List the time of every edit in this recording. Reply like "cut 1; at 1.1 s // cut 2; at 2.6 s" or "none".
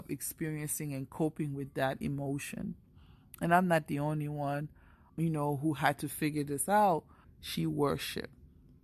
cut 1; at 5.1 s // cut 2; at 7.2 s